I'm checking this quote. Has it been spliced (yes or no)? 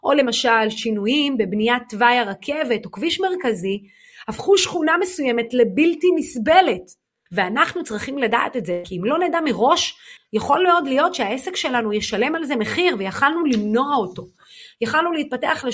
yes